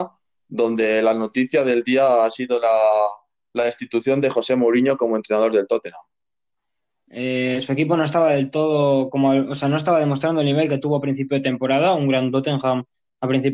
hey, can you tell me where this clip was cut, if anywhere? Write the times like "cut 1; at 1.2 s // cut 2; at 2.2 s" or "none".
cut 1; at 7.1 s